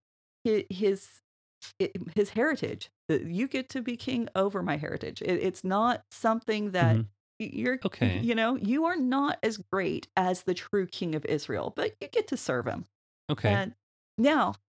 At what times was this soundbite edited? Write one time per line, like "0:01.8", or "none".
0:07.2